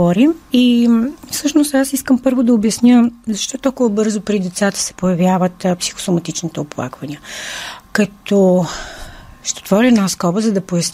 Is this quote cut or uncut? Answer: uncut